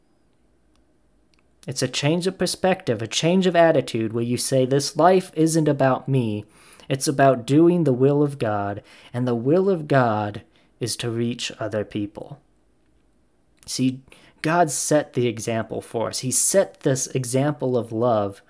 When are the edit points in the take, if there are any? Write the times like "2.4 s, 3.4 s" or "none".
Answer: none